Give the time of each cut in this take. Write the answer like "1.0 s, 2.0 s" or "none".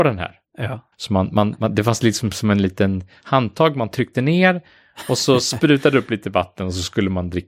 0.9 s

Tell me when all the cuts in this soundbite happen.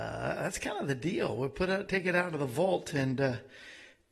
none

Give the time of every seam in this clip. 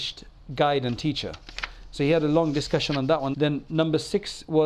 3.3 s

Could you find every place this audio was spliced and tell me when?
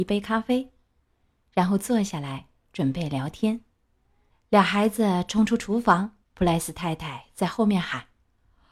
4.3 s, 6.2 s

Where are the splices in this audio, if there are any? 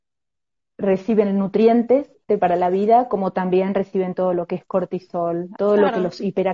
2.3 s, 5.6 s

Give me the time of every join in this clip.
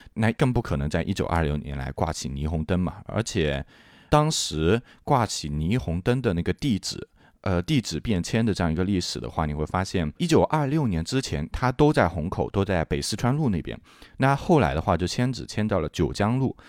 7.3 s

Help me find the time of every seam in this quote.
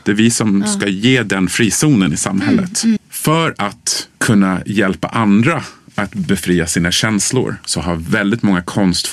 3.0 s, 4.2 s

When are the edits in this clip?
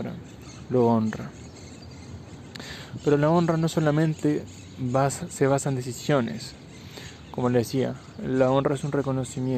none

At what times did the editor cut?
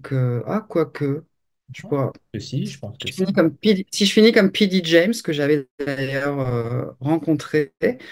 none

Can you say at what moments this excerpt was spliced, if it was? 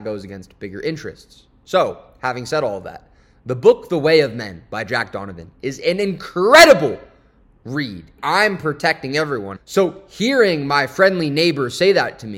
8.2 s, 9.6 s

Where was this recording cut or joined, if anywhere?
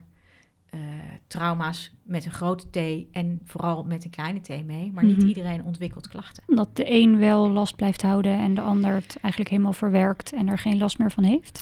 6.5 s

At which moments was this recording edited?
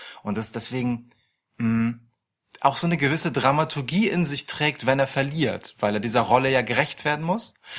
none

